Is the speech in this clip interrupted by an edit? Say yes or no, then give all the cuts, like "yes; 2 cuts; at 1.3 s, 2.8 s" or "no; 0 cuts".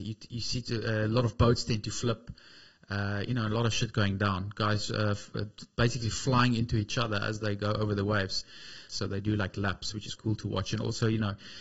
yes; 2 cuts; at 8.9 s, 10.2 s